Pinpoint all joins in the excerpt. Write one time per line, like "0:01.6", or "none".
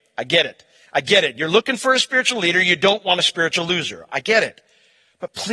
none